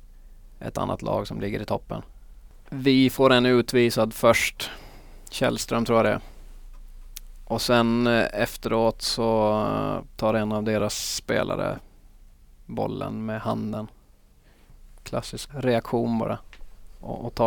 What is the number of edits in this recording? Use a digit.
1